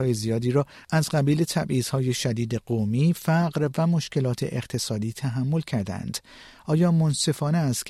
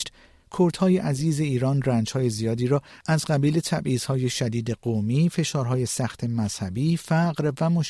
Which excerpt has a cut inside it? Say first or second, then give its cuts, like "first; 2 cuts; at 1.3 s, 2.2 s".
first; 1 cut; at 3.2 s